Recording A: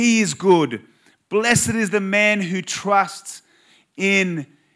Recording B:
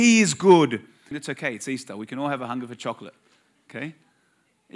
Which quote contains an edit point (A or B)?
B